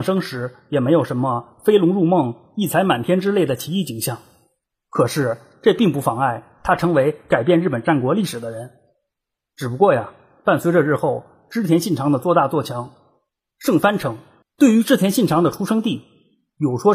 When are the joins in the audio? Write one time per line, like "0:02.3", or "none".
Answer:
0:09.4
0:14.4